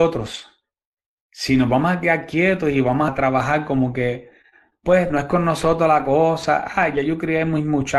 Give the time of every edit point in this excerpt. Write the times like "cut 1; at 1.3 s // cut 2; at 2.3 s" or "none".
cut 1; at 3.1 s